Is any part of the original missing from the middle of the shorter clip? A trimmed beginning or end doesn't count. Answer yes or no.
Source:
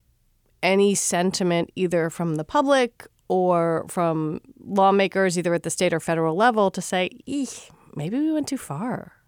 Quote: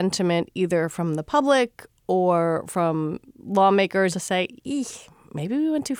yes